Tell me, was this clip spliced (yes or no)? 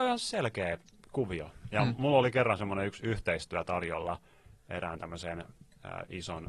no